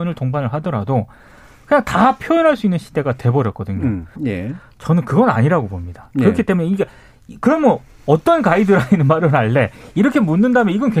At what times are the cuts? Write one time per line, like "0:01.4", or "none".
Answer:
0:04.1